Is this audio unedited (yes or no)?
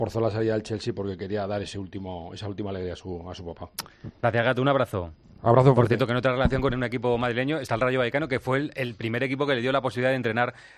yes